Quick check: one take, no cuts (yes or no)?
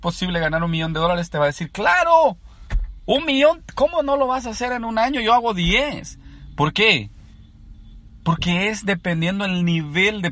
yes